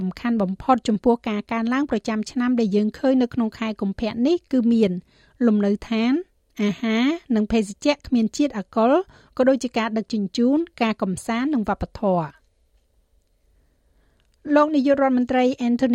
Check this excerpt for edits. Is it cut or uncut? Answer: uncut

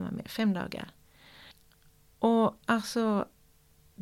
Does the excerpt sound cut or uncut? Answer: uncut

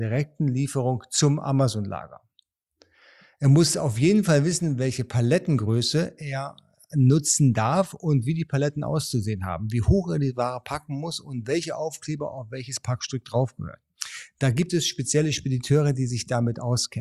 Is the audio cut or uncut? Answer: uncut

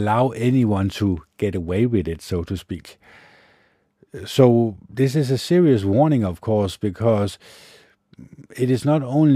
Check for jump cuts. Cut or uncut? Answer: uncut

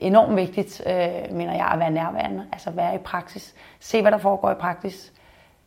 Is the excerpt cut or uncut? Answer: uncut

